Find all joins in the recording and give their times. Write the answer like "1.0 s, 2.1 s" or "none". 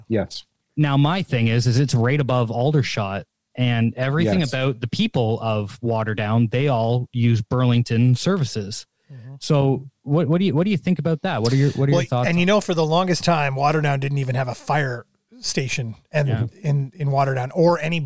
16.0 s